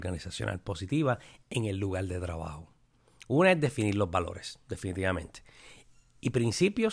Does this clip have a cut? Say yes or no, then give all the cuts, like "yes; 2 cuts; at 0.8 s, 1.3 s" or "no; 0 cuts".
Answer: no; 0 cuts